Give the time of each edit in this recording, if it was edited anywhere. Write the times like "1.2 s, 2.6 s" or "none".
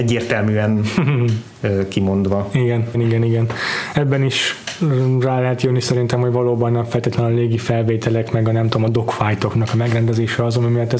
2.9 s